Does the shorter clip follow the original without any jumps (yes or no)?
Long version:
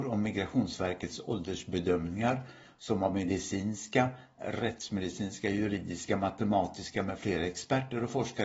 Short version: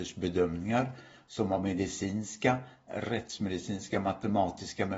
no